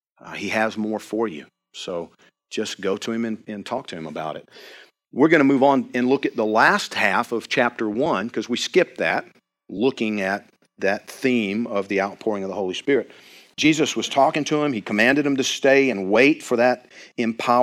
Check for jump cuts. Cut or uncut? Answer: uncut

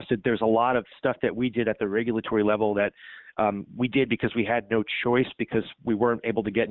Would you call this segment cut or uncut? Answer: uncut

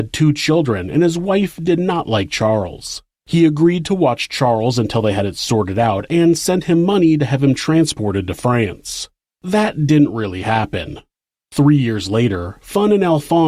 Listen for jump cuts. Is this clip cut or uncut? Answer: cut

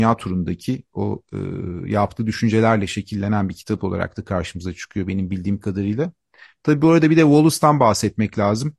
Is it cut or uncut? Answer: uncut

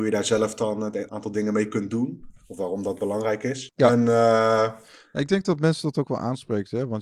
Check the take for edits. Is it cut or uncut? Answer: cut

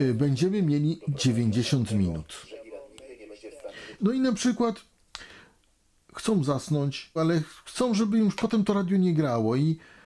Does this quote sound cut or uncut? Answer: cut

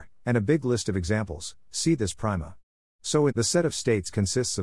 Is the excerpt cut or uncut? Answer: cut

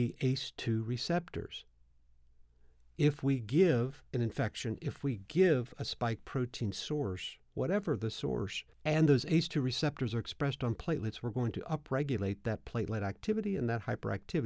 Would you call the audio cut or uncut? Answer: cut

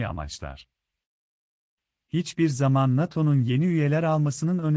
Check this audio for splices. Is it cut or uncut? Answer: uncut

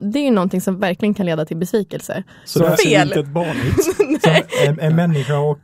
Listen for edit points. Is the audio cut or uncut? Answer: cut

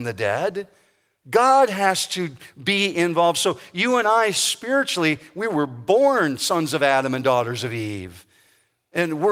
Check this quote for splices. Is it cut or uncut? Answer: uncut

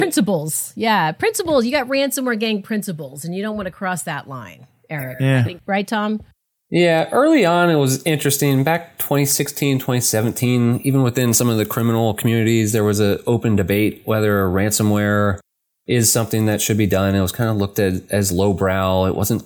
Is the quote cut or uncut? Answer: uncut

